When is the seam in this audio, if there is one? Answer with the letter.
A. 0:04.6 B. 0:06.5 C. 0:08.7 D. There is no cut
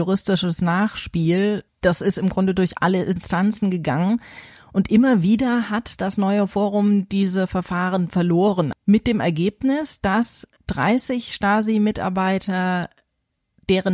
C